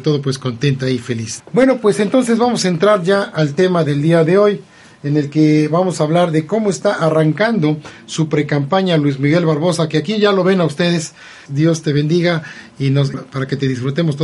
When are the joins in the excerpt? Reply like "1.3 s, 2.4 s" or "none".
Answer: 1.4 s, 11.5 s, 13.1 s